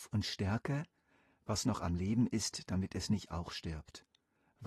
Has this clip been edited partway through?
no; 0 cuts

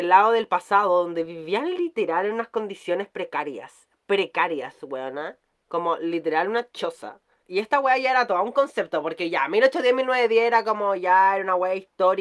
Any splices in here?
yes; 1 cut; at 7.4 s

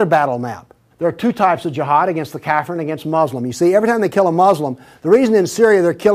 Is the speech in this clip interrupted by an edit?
yes; 1 cut; at 0.9 s

